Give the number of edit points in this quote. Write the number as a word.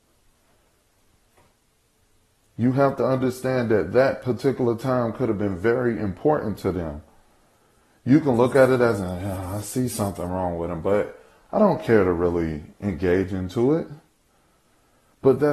zero